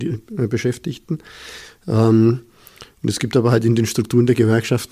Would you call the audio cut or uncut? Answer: uncut